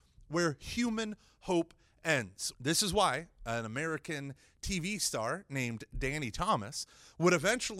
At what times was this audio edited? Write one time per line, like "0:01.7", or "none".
0:02.5